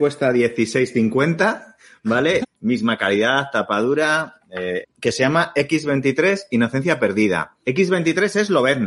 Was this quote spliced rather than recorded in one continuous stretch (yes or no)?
yes